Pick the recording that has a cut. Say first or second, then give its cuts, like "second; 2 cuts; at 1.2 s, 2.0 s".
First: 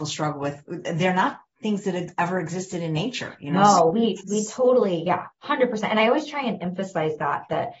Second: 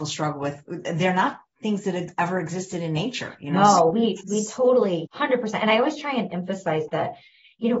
second; 2 cuts; at 5.1 s, 6.9 s